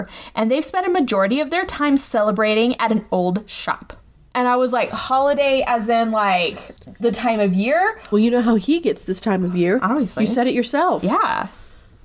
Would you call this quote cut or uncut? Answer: cut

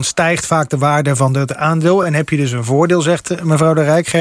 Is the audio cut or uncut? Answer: uncut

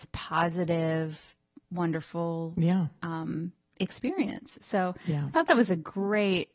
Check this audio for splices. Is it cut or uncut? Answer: uncut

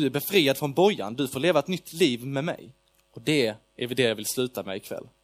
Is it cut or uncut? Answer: cut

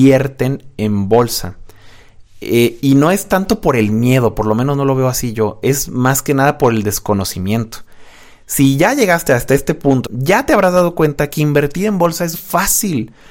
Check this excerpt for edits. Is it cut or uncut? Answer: cut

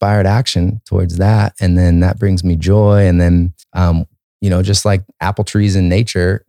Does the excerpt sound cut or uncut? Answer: cut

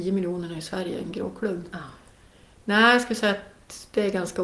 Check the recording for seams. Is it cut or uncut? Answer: uncut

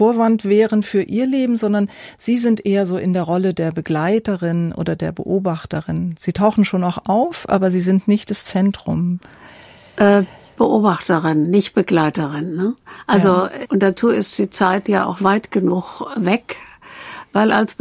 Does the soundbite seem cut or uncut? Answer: cut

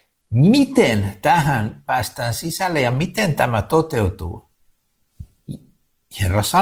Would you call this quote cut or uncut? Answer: uncut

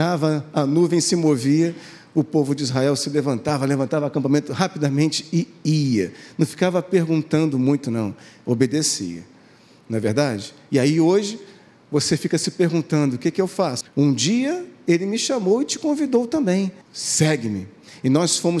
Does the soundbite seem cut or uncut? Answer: cut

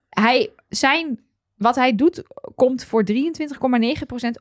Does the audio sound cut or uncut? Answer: uncut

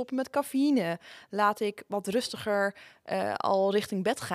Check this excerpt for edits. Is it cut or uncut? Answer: uncut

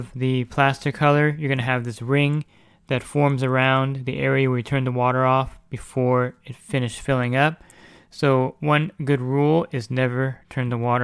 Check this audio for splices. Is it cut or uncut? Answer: uncut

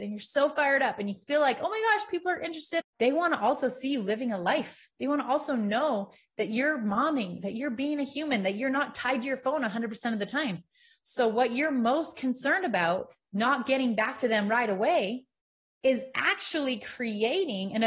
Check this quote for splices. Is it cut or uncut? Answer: cut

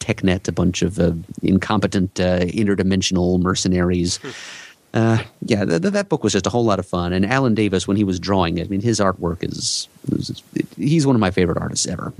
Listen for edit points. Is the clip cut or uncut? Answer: uncut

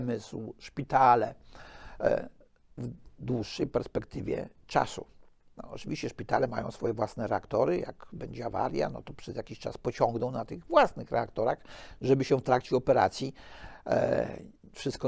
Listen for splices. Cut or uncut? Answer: uncut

